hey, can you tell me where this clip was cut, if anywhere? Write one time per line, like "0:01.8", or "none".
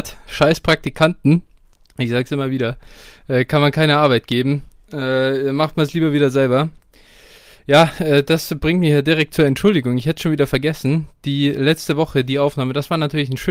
none

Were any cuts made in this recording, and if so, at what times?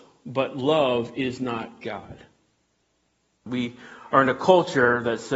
0:03.5

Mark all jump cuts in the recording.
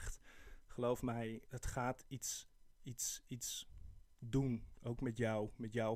0:01.5

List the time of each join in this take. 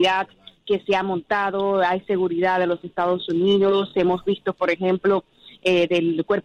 none

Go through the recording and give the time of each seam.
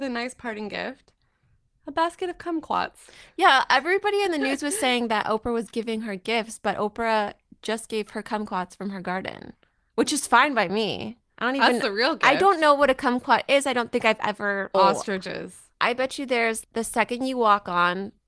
0:14.7
0:16.6

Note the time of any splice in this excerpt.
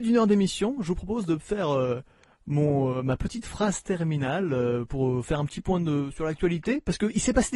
none

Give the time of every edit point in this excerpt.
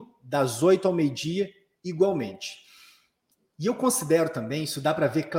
none

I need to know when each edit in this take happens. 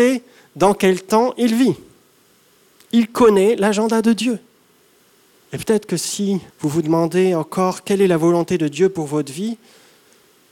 0:05.3
0:06.5

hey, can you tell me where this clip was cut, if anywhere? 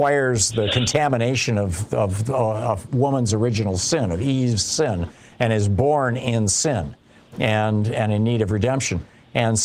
none

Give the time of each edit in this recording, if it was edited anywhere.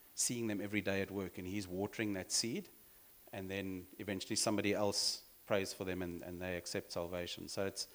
none

